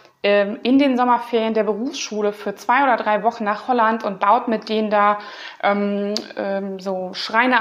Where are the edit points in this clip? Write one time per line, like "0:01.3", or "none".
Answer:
none